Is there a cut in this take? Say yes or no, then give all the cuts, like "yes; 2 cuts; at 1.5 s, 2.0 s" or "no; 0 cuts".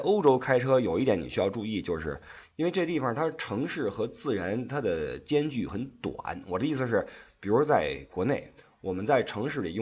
no; 0 cuts